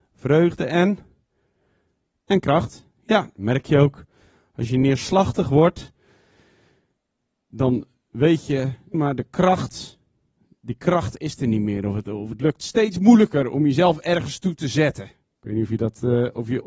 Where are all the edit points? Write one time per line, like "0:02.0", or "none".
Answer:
0:08.9